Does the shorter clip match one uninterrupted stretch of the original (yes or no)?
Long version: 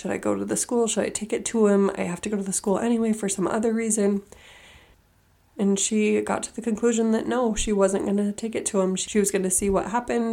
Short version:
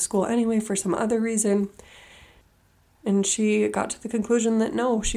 yes